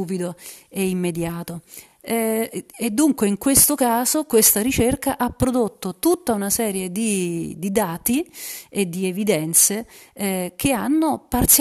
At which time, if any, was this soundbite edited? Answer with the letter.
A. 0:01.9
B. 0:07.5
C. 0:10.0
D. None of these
D